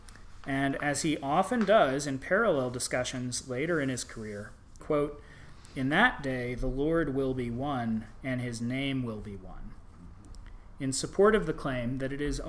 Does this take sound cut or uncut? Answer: cut